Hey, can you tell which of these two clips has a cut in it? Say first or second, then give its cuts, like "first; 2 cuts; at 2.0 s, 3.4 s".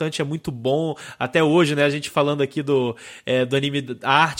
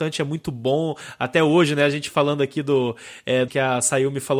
second; 1 cut; at 3.5 s